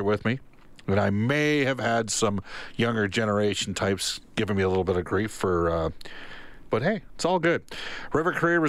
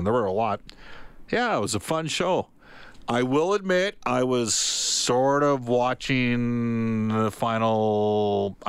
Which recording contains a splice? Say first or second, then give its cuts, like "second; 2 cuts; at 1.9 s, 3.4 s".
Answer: first; 1 cut; at 6.7 s